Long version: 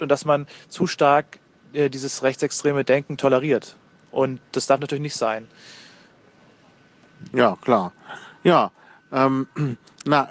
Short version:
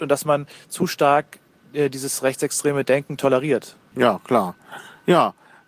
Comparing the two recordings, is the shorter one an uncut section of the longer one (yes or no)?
no